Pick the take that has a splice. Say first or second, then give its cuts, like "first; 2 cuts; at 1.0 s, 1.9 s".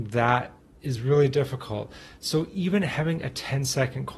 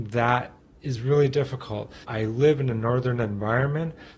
second; 1 cut; at 2.0 s